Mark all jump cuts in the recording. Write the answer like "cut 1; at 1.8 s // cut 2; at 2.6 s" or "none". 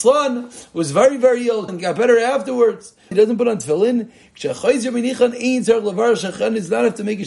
cut 1; at 1.7 s // cut 2; at 3.1 s